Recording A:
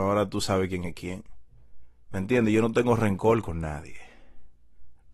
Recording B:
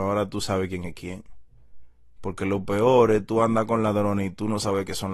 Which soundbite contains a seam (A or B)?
A